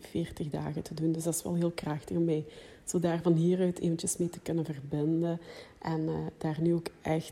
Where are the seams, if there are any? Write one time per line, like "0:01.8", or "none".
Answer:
none